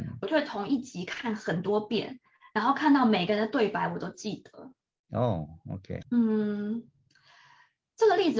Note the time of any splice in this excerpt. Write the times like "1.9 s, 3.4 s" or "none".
6.0 s